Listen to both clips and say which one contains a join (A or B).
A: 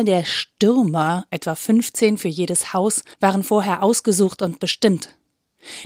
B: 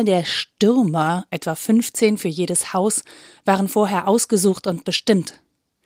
A